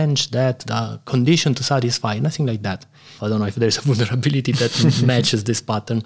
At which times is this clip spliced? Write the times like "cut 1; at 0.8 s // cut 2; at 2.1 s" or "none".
cut 1; at 3.2 s